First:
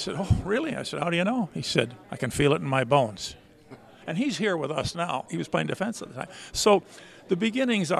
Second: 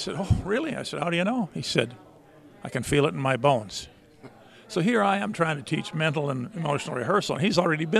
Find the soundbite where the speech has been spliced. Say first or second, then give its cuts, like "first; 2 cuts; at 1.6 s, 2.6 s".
first; 3 cuts; at 2.0 s, 4.0 s, 5.3 s